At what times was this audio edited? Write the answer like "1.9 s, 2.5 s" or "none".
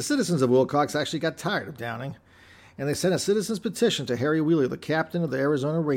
none